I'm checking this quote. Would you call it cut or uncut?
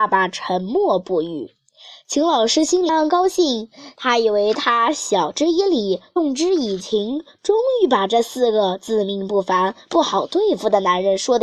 cut